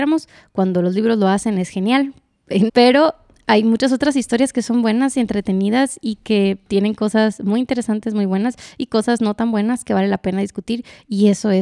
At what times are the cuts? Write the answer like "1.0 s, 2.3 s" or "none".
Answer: 2.7 s